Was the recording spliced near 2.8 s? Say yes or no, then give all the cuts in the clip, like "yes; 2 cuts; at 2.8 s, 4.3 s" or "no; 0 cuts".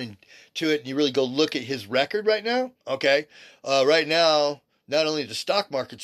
yes; 1 cut; at 2.8 s